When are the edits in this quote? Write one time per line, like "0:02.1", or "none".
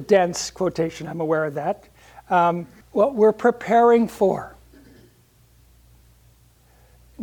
0:02.8